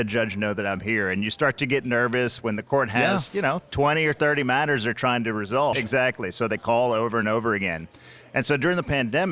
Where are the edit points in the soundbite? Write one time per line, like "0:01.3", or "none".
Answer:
0:05.7